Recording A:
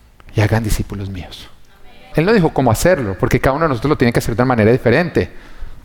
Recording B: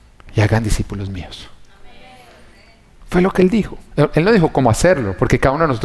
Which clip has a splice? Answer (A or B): A